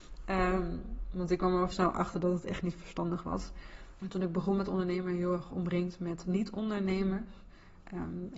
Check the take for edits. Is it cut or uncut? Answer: cut